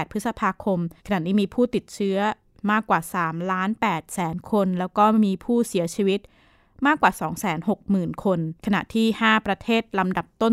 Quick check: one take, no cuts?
no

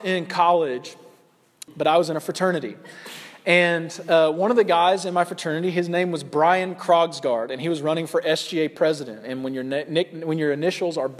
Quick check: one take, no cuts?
no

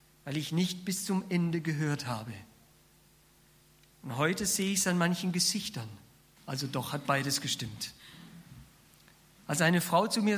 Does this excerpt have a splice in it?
yes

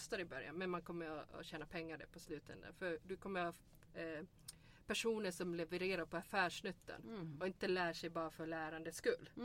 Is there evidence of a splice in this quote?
no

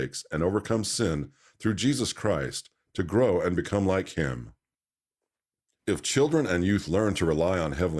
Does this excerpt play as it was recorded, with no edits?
yes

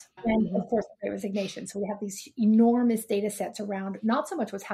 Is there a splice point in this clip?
no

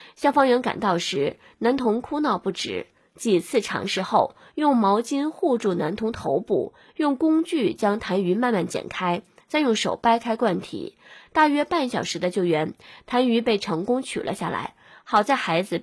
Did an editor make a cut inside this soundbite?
no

